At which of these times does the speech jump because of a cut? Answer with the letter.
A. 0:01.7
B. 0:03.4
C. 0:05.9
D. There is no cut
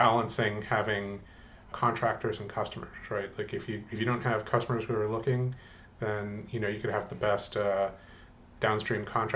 A